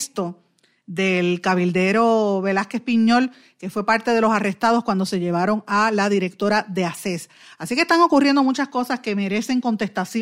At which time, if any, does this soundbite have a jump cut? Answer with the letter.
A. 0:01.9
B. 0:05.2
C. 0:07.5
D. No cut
D